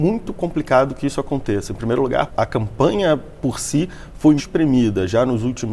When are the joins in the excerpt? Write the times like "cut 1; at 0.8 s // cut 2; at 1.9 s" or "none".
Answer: cut 1; at 2.3 s // cut 2; at 4.4 s